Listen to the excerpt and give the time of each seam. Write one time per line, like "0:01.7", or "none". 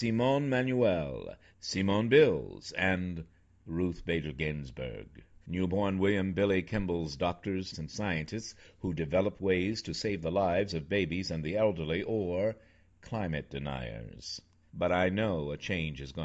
0:05.4
0:07.7
0:14.6